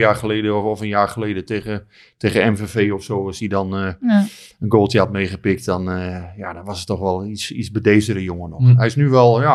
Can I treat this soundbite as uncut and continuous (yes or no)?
yes